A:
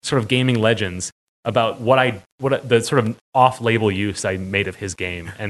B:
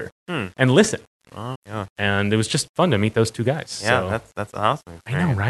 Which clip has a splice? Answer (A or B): B